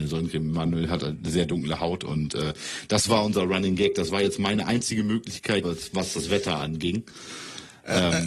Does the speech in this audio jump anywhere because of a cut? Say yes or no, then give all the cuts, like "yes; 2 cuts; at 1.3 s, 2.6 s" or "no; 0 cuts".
yes; 1 cut; at 5.6 s